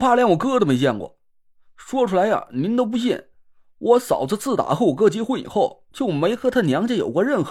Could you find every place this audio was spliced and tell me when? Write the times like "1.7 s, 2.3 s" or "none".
none